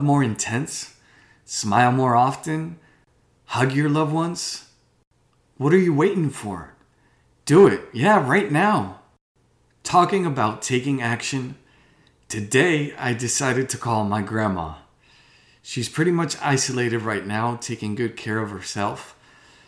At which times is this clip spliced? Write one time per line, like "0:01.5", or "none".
none